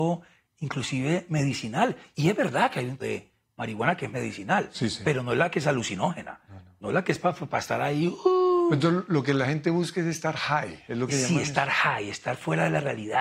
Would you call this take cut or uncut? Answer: cut